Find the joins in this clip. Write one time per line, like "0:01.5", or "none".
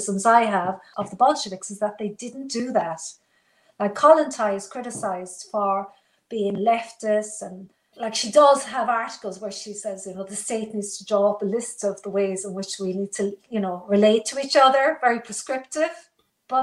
none